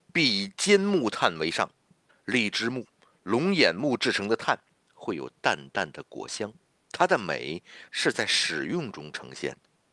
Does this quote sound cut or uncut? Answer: cut